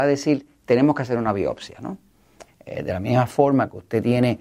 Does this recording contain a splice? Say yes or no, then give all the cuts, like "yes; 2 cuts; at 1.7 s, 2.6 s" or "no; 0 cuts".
yes; 1 cut; at 2.5 s